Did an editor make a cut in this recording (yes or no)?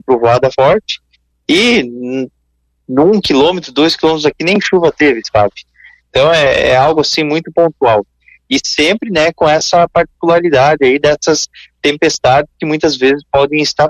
no